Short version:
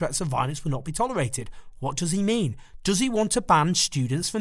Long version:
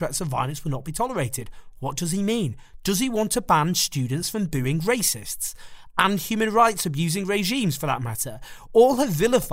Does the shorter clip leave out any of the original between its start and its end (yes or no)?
no